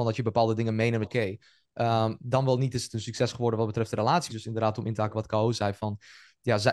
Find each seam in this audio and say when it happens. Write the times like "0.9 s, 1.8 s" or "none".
1.0 s, 4.3 s